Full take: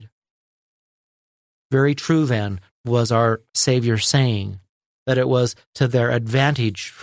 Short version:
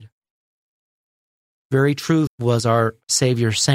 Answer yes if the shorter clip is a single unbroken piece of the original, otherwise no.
no